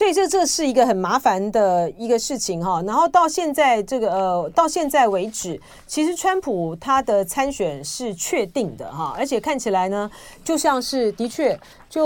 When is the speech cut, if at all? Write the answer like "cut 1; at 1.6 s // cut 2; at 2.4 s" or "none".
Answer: none